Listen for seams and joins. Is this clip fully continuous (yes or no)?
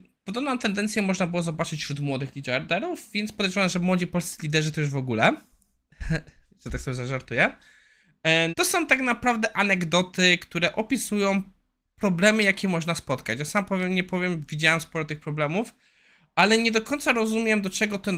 no